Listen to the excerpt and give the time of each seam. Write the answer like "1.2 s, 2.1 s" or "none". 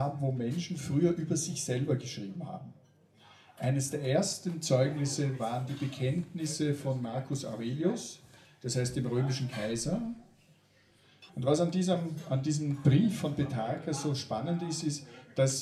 11.3 s

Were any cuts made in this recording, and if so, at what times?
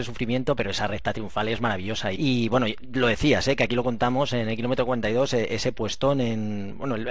2.2 s

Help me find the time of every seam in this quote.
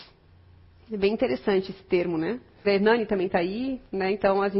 2.6 s

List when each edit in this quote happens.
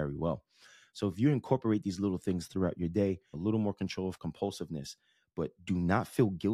3.3 s

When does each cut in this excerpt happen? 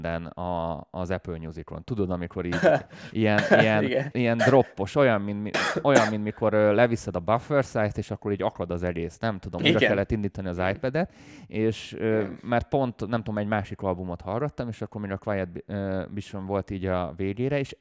4.1 s

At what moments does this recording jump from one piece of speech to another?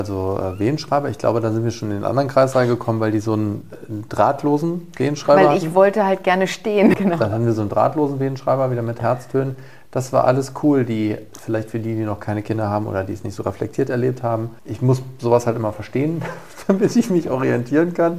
6.9 s, 11.3 s, 14.6 s

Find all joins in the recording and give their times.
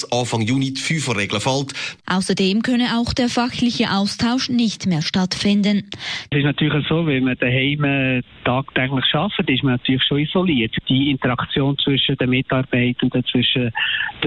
2.0 s, 6.3 s

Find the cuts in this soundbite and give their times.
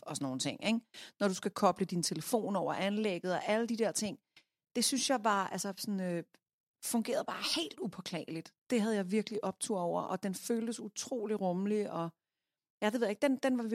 none

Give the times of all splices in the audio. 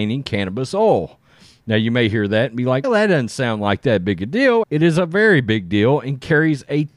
2.8 s, 4.6 s

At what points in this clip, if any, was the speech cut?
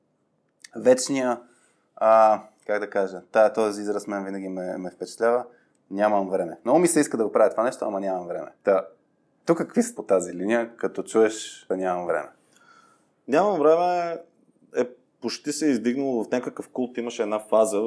8.6 s, 10.0 s, 11.7 s

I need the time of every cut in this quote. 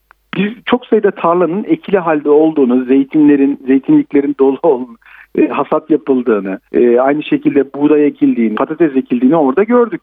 6.6 s, 8.5 s

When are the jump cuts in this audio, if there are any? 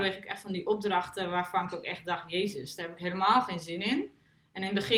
none

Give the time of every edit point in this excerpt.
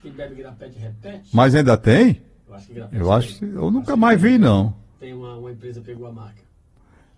none

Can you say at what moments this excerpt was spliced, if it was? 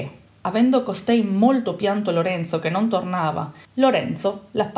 3.6 s

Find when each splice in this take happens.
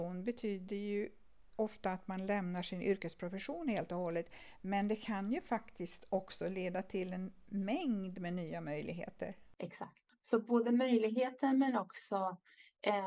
9.6 s

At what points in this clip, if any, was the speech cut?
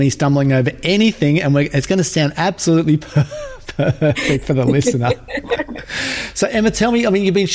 none

